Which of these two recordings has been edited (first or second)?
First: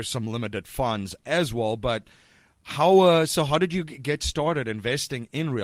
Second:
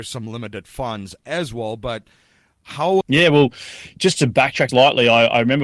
second